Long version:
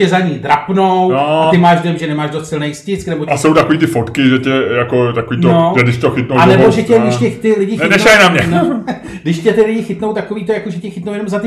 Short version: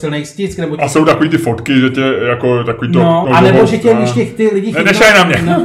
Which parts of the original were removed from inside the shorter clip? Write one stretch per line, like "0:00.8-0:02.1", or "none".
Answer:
0:05.7-0:06.3